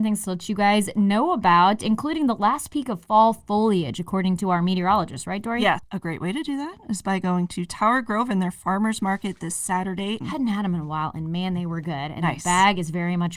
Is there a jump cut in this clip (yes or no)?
yes